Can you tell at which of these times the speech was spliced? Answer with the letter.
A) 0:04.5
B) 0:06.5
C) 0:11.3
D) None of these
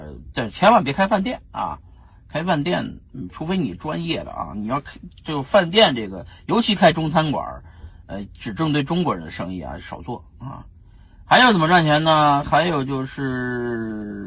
C